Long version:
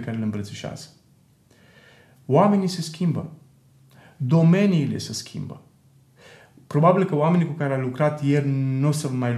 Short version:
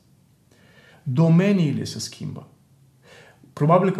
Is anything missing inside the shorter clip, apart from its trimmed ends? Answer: yes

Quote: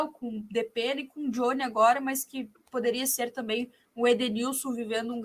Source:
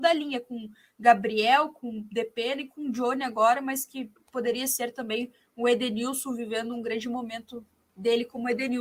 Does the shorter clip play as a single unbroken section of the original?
yes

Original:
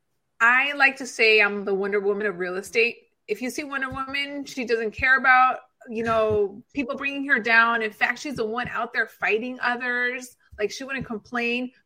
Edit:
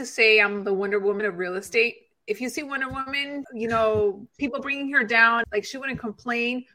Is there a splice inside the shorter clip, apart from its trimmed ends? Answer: yes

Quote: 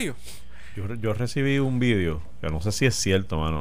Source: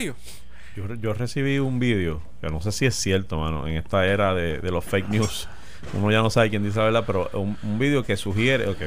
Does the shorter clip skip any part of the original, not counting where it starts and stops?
no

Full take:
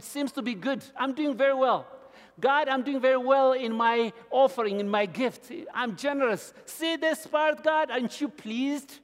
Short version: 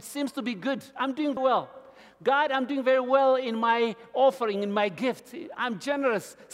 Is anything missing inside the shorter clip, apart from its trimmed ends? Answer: yes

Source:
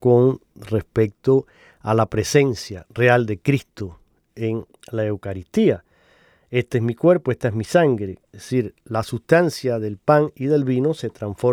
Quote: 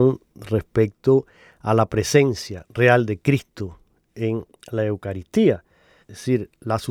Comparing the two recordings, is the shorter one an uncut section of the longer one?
no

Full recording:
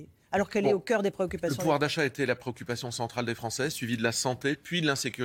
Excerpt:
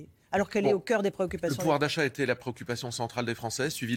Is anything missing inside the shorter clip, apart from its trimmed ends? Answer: no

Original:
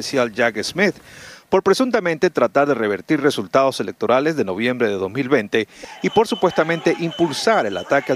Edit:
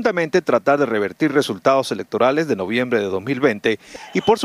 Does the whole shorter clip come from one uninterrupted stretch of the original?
yes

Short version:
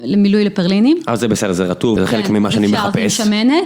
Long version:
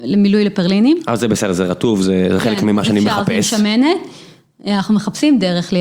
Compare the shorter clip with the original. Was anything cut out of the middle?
yes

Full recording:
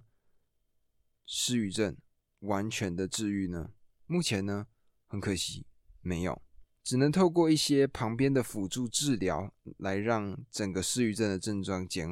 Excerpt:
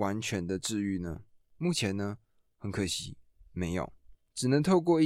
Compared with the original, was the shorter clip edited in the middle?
no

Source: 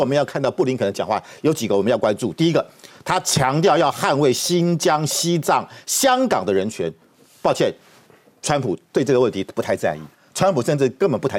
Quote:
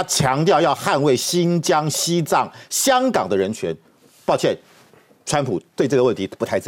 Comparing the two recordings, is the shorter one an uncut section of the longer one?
yes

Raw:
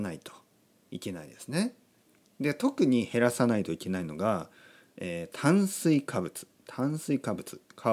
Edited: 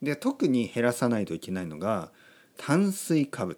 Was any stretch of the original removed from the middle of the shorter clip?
yes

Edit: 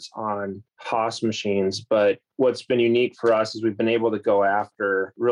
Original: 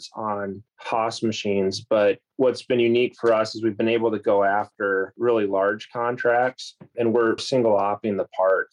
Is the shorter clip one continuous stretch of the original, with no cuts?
yes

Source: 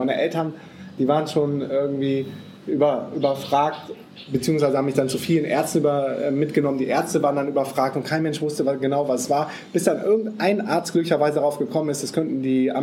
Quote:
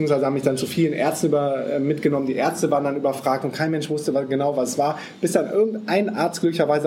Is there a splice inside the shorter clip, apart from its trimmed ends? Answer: no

